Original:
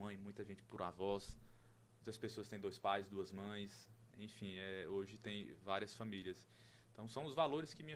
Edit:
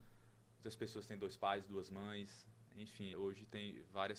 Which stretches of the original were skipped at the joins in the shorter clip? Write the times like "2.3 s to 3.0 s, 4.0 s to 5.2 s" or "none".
4.5 s to 4.8 s